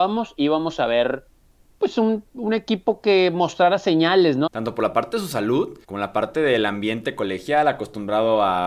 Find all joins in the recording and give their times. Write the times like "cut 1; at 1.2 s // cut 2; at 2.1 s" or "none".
cut 1; at 4.5 s // cut 2; at 5.8 s